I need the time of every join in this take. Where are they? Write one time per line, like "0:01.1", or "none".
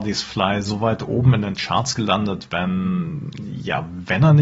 none